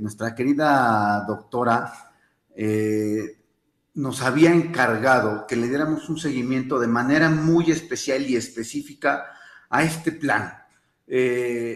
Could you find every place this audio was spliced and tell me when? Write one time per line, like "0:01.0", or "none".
none